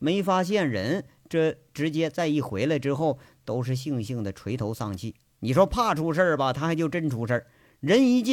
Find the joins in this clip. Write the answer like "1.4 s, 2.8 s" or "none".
none